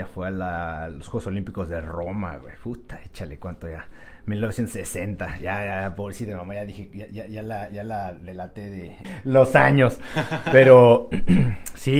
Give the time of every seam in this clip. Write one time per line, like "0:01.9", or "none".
0:09.0

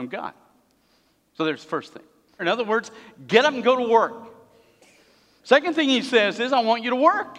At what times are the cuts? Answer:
0:02.4

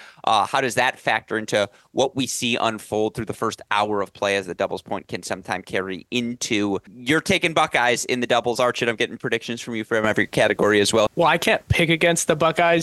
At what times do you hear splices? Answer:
0:06.9
0:11.1

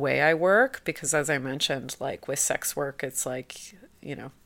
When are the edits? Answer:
none

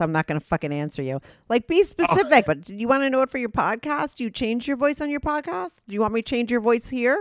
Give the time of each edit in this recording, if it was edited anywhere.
0:02.5

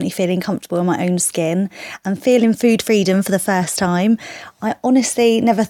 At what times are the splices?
none

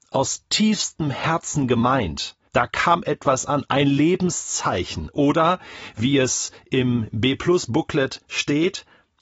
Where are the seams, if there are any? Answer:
0:02.4

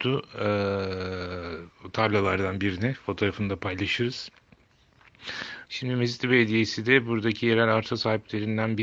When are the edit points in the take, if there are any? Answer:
0:05.7

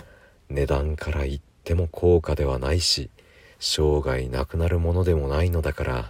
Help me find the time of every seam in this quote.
none

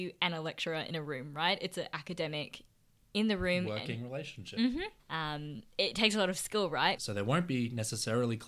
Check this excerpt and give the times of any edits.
0:05.0
0:07.0

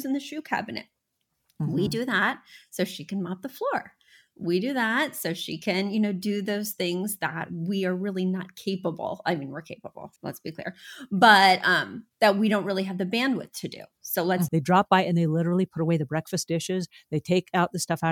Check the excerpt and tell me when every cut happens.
0:10.2
0:12.1
0:14.5

